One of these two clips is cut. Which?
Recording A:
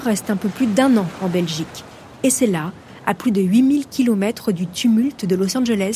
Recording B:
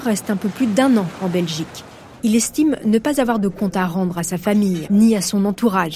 B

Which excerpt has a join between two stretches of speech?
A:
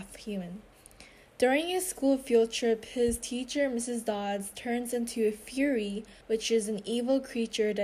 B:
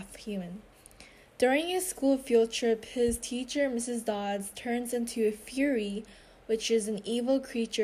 A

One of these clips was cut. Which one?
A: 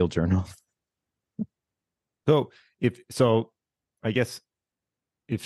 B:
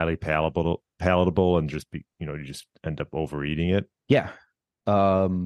B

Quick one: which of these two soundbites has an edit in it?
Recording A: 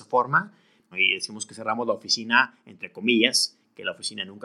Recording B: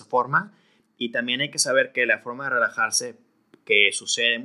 A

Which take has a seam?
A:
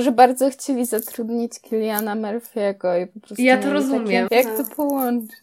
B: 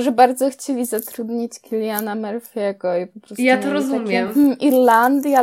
A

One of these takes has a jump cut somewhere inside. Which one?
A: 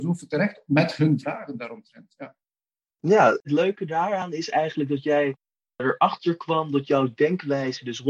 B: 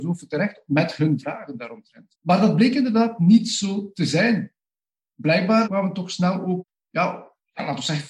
B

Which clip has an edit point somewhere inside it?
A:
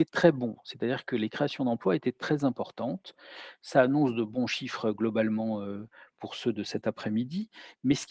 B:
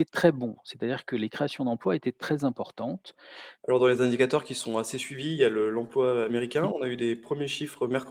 B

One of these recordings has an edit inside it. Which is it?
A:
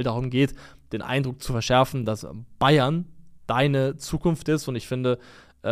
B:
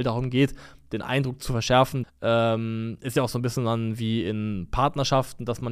B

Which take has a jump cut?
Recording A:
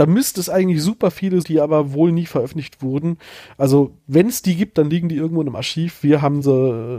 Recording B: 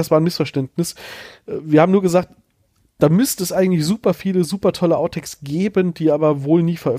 A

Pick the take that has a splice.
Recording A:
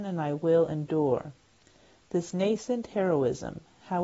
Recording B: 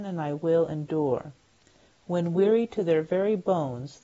B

